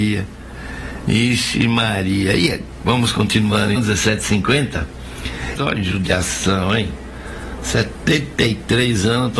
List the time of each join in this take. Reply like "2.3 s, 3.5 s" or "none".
3.8 s, 5.6 s